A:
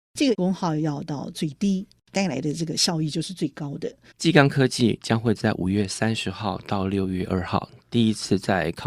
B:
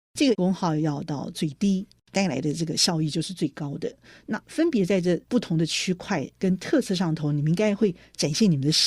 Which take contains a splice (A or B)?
A